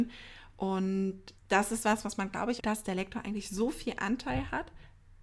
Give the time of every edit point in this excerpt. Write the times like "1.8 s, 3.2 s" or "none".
1.4 s, 2.6 s